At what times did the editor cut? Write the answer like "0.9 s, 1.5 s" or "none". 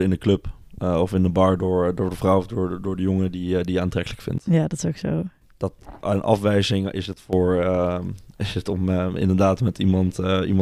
none